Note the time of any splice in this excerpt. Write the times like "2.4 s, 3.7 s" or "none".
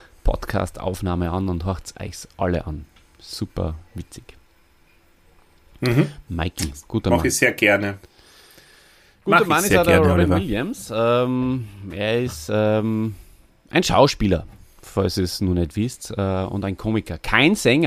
none